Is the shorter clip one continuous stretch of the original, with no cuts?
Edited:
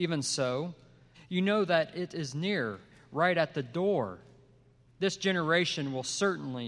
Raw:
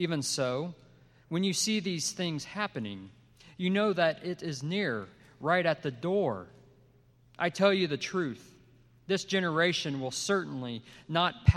no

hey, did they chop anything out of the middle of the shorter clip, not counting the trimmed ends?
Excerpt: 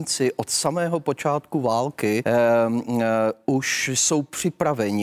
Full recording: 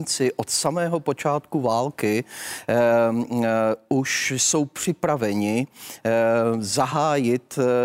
yes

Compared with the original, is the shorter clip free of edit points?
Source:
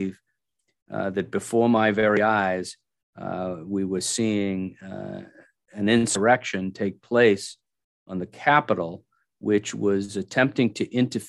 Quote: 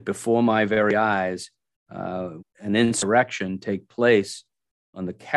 no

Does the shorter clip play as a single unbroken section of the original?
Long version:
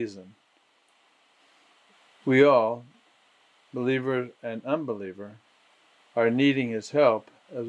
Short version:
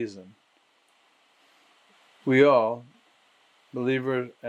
yes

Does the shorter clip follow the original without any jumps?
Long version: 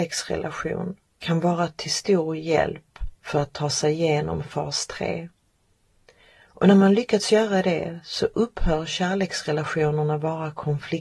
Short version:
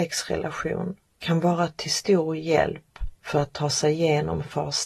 yes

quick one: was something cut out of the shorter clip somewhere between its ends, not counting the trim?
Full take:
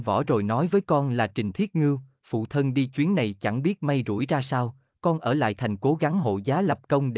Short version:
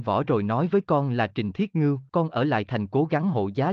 yes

